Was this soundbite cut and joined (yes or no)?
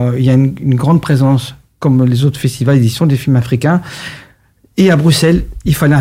no